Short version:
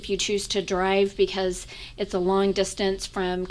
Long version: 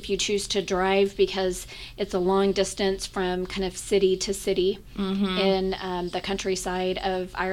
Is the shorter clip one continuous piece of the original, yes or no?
yes